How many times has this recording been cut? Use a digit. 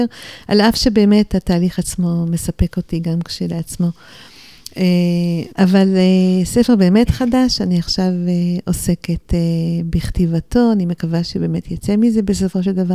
1